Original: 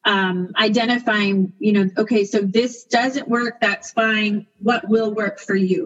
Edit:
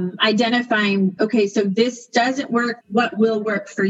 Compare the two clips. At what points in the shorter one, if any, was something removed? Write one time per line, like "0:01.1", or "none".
0:01.2
0:02.8